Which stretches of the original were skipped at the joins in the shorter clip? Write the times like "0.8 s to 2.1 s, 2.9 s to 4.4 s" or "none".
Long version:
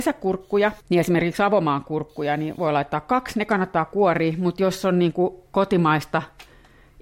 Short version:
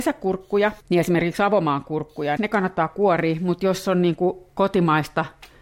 2.4 s to 3.3 s